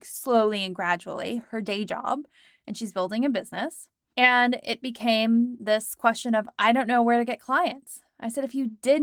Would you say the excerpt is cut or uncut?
uncut